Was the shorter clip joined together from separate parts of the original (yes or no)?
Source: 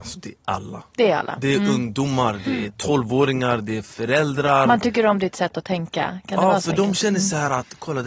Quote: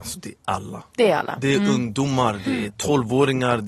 no